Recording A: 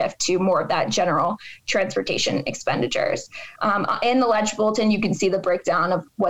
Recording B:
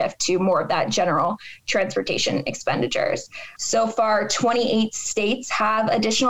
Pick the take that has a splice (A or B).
B